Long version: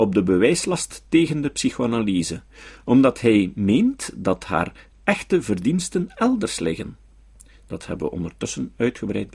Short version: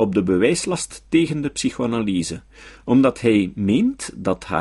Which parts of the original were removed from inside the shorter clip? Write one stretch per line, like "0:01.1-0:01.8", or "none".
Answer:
none